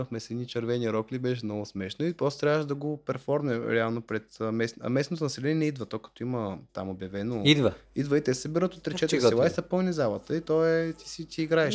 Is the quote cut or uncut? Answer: uncut